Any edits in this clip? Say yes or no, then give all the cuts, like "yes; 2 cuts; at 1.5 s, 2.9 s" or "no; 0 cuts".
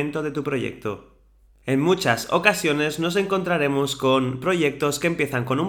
no; 0 cuts